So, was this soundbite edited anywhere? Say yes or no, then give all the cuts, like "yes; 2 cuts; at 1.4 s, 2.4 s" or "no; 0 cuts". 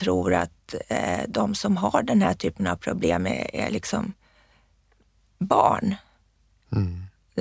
no; 0 cuts